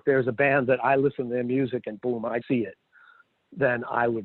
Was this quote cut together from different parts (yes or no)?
yes